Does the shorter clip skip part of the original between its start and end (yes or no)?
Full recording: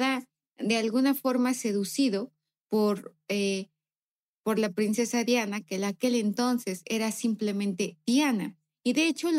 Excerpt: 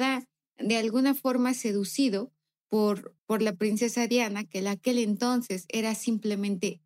yes